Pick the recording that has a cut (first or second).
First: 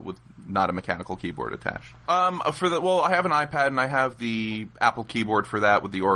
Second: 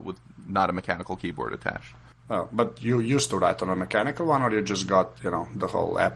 first